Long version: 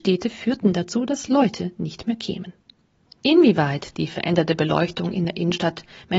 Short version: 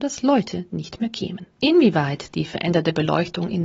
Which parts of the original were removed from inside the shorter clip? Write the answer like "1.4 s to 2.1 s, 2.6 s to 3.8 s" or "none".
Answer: 2.6 s to 3.2 s